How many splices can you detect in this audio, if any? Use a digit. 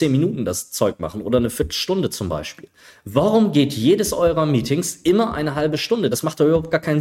0